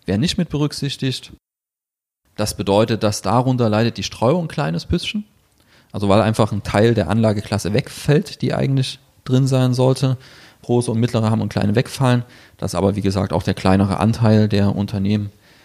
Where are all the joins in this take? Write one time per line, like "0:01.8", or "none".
none